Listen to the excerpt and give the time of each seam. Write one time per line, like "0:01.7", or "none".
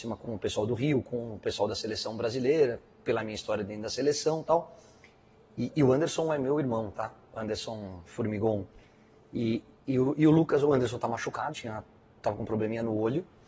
0:11.5